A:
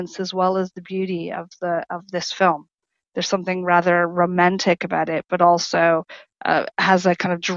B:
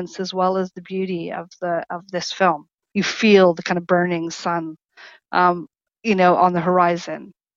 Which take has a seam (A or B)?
B